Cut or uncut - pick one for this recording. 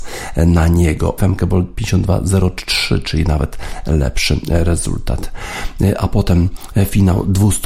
cut